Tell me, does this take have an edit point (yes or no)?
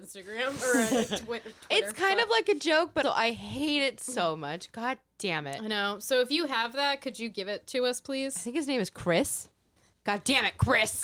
yes